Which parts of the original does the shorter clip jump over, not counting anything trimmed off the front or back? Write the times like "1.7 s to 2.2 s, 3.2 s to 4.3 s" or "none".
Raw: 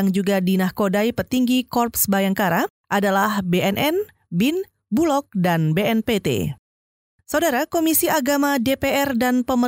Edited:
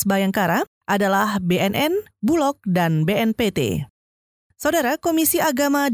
4.1 s to 4.8 s